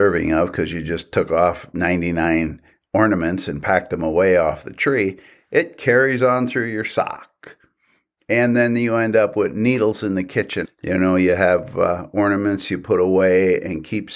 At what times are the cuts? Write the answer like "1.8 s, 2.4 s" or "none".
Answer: 10.6 s